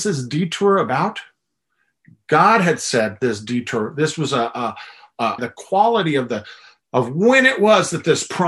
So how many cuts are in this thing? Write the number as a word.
two